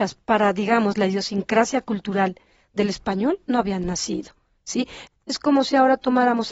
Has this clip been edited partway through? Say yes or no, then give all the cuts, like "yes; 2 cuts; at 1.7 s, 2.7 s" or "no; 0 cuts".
yes; 1 cut; at 5.1 s